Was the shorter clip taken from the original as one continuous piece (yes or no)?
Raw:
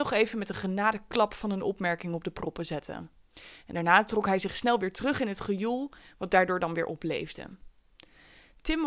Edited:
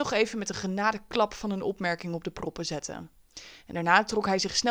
yes